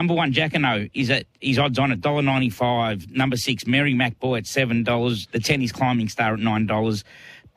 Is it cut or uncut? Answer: cut